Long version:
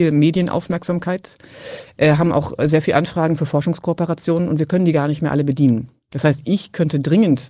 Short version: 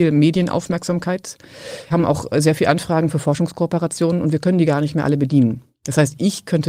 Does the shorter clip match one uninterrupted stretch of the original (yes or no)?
no